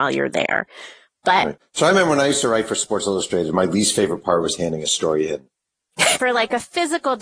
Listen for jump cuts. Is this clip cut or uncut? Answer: cut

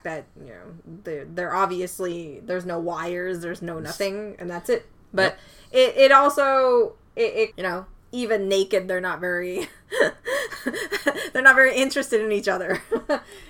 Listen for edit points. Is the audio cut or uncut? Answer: cut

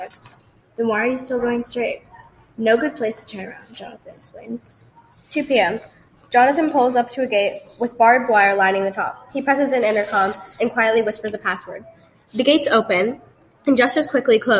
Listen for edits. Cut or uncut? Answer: uncut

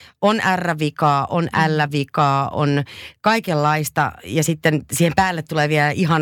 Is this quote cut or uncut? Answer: uncut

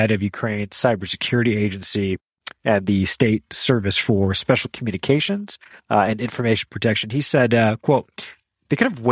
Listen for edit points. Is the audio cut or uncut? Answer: uncut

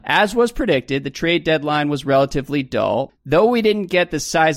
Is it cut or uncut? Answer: cut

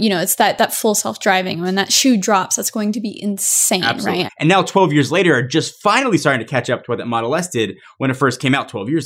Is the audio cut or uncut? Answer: cut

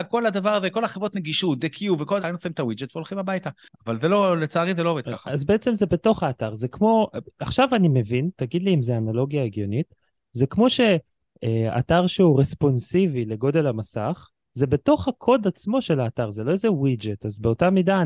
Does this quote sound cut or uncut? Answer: cut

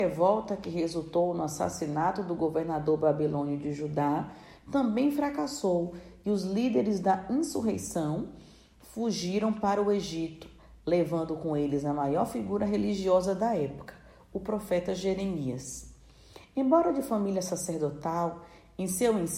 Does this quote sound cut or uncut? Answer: uncut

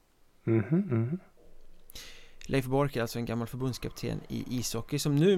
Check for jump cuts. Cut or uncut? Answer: uncut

